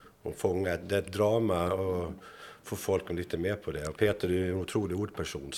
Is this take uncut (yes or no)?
yes